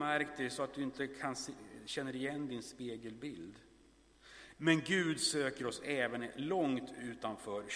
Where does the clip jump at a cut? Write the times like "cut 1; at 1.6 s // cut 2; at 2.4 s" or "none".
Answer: cut 1; at 4.5 s